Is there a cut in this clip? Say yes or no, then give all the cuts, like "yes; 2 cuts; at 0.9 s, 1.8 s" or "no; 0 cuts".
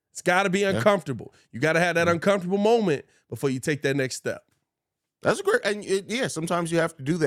no; 0 cuts